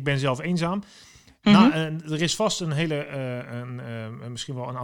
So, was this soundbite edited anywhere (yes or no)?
no